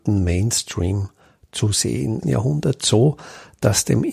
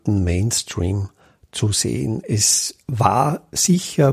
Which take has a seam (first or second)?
first